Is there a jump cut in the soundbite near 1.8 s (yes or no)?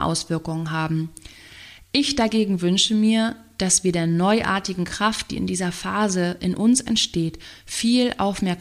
no